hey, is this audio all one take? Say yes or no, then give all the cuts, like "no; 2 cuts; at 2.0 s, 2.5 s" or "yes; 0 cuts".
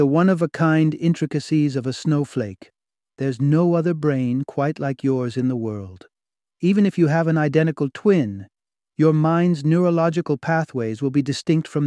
yes; 0 cuts